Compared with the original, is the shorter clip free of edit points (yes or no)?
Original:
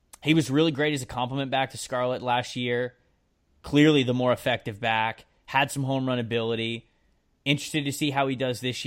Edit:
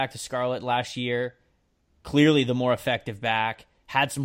yes